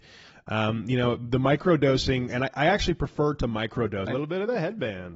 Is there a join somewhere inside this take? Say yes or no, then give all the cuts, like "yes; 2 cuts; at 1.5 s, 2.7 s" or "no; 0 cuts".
yes; 1 cut; at 4.1 s